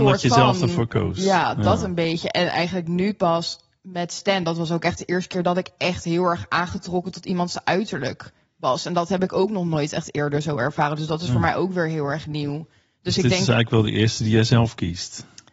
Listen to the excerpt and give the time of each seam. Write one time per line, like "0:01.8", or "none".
none